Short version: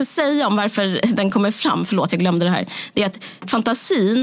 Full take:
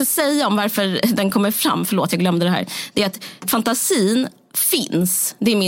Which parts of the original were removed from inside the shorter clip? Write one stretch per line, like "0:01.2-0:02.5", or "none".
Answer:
none